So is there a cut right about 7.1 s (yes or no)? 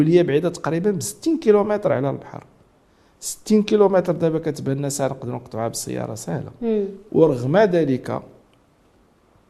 yes